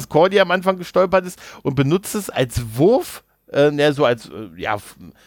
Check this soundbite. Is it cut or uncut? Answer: uncut